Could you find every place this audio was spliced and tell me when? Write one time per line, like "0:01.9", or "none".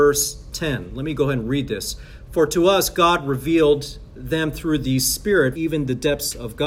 0:05.5